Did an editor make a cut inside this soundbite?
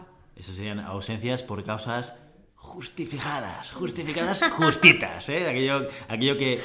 yes; 1 cut; at 2.5 s

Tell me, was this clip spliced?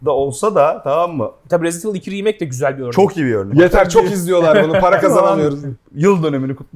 yes; 3 cuts; at 1.5 s, 3.5 s, 5.7 s

